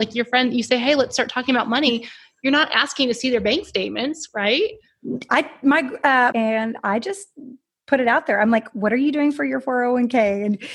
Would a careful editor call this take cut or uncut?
cut